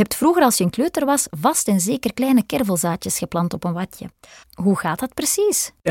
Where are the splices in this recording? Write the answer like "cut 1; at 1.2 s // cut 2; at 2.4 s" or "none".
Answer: cut 1; at 4.4 s